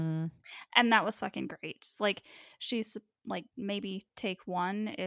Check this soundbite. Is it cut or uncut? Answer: uncut